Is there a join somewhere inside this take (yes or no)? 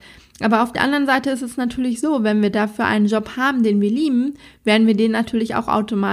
no